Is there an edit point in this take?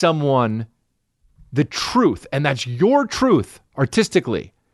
yes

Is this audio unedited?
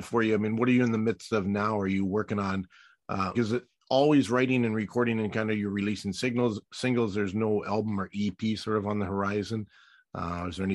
no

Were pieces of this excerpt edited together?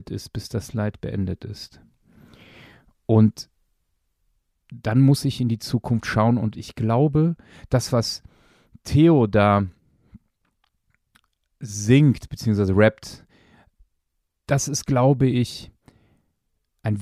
no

